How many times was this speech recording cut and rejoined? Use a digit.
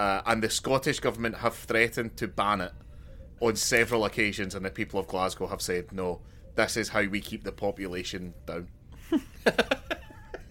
1